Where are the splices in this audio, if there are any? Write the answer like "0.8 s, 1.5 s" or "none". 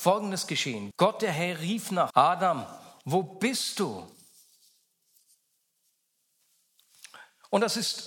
0.9 s, 2.1 s